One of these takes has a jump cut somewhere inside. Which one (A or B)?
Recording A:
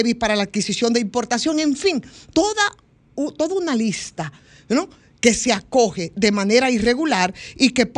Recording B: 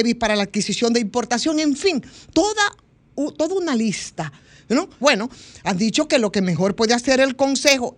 B